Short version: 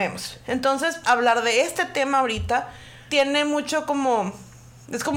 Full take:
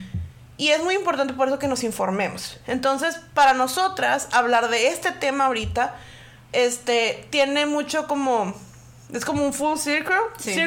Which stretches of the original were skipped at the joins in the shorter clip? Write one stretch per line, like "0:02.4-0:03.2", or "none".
0:03.2-0:04.3
0:06.3-0:07.3